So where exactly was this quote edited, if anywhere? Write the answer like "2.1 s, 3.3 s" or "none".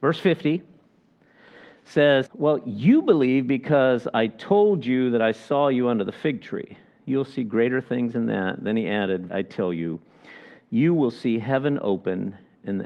2.3 s, 9.3 s